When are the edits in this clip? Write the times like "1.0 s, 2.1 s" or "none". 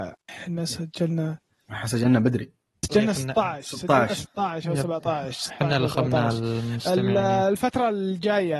none